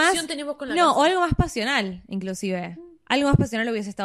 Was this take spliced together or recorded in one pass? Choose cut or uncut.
uncut